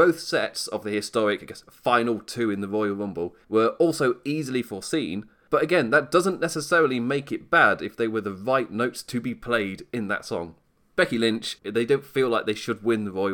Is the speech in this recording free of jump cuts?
no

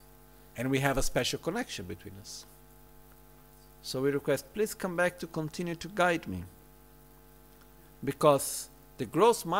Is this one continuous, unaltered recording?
yes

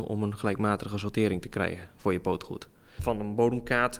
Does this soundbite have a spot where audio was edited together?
yes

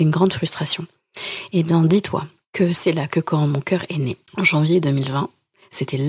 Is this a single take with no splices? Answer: no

